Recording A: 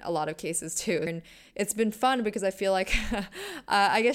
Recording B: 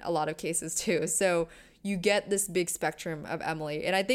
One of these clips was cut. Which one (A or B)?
A